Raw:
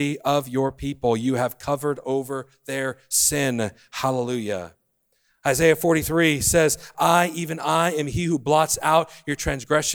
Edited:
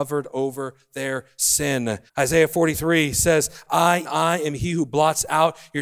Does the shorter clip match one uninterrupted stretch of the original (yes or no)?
no